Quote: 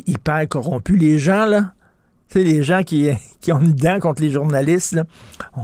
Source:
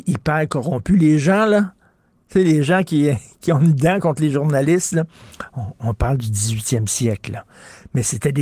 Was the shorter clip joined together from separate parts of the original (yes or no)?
no